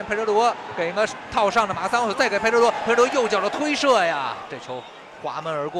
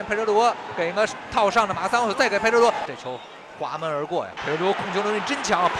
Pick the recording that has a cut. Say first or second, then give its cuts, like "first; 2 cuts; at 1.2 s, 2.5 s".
second; 2 cuts; at 2.9 s, 4.4 s